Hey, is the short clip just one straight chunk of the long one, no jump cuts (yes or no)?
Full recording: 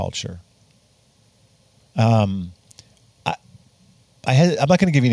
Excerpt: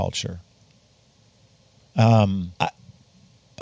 no